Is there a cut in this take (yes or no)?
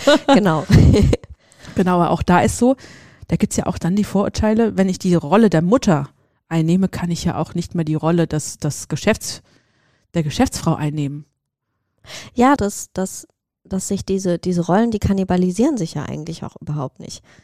yes